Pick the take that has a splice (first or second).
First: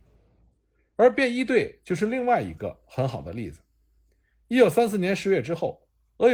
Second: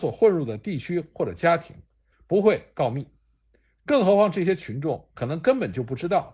second